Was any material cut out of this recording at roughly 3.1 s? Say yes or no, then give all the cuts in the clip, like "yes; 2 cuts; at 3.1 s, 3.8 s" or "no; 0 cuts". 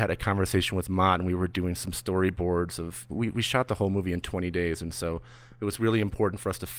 no; 0 cuts